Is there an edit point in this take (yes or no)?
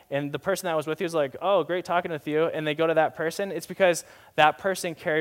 no